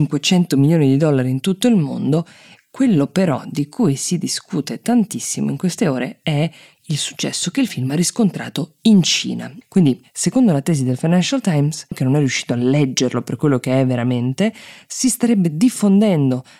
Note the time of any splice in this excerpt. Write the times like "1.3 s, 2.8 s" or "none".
9.6 s, 11.9 s